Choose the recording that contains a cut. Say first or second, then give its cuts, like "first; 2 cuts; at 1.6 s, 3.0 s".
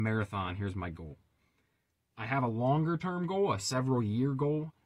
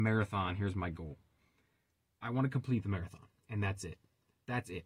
first; 1 cut; at 2.1 s